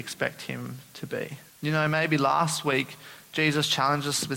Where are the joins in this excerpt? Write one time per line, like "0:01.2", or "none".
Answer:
0:01.5